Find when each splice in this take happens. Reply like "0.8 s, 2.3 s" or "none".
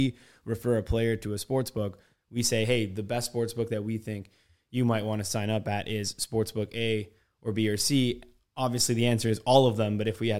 none